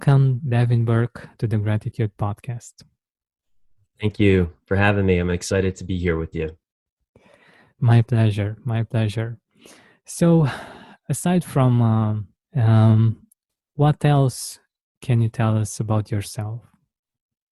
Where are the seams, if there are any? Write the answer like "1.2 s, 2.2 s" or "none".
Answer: 12.4 s